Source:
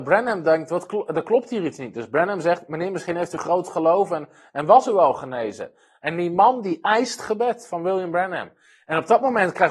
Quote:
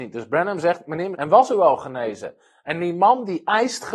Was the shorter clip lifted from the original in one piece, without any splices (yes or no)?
no